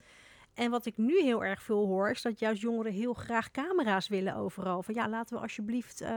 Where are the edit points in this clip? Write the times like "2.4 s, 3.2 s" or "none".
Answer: none

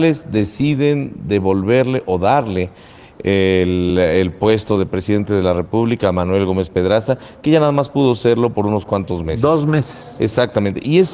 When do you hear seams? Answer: none

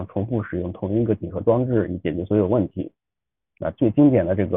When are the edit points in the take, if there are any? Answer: none

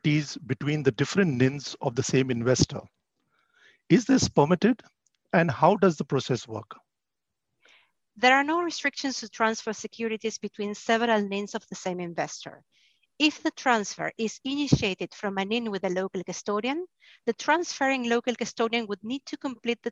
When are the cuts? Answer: none

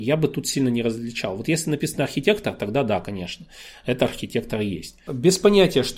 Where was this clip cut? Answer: 5.1 s

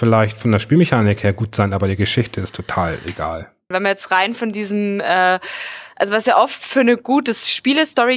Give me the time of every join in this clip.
3.7 s

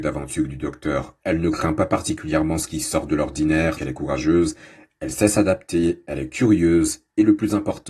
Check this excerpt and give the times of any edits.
3.8 s

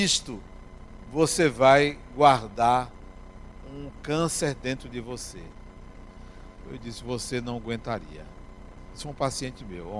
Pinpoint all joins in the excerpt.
6.7 s

